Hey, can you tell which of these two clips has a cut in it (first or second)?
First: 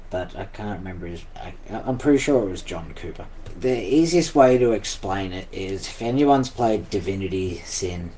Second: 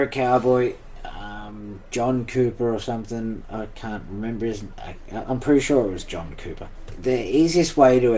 second